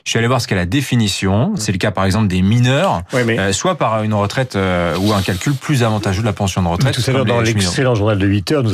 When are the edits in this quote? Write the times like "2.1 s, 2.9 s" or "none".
1.6 s